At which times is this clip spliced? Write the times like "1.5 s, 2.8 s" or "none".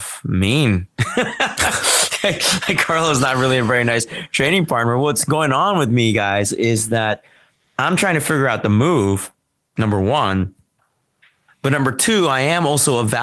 none

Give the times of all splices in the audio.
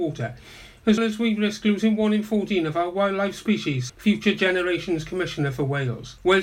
1.0 s, 3.9 s

